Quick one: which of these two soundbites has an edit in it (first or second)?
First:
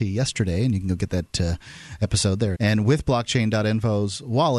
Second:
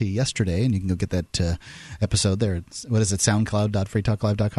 first